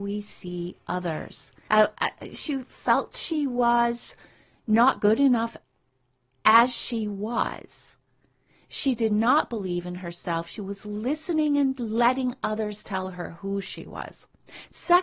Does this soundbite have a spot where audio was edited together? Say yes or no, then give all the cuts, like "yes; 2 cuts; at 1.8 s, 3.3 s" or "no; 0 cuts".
yes; 1 cut; at 1.7 s